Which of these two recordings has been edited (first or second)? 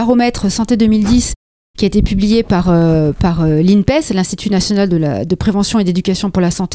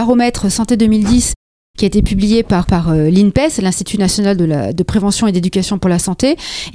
second